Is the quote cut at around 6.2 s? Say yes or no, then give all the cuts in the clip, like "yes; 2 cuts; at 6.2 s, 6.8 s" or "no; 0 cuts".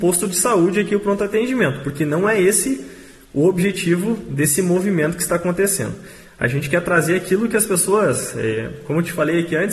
no; 0 cuts